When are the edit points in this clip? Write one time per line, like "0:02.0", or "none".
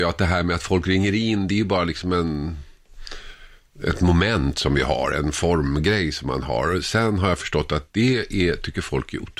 none